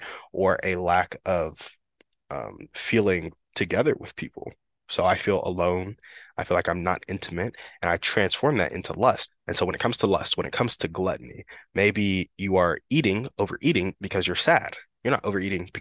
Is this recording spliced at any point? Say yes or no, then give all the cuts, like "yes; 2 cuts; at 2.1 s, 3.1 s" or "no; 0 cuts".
yes; 1 cut; at 9.3 s